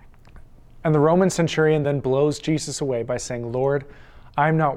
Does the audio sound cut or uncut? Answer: uncut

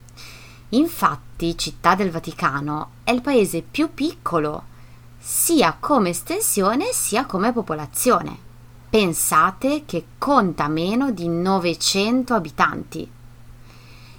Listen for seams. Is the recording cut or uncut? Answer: uncut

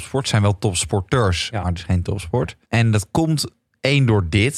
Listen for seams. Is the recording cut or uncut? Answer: cut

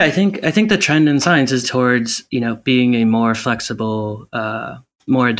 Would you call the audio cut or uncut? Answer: cut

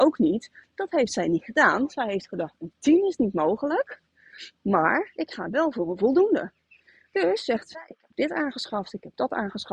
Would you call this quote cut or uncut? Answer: uncut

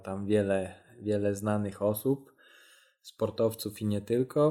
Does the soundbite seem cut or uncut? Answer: uncut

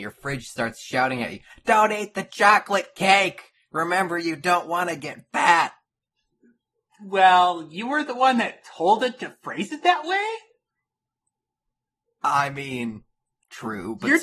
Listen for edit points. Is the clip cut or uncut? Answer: uncut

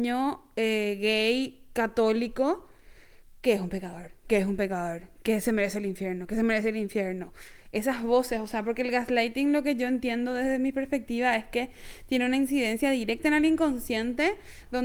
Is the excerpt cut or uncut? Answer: uncut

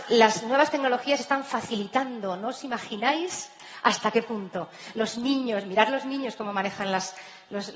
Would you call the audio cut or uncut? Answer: uncut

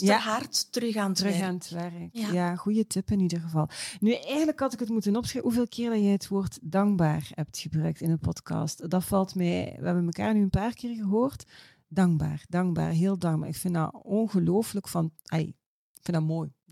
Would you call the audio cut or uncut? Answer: uncut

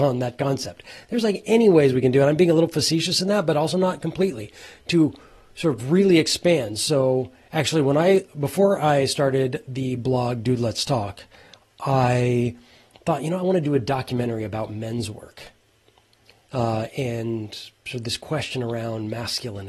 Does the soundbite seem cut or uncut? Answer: uncut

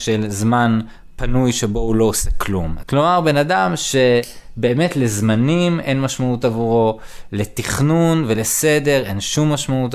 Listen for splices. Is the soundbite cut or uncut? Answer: cut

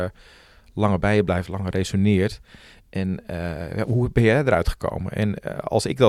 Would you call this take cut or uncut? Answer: uncut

